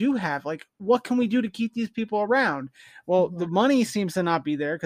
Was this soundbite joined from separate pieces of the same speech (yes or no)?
no